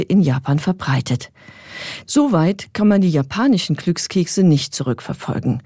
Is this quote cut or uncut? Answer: cut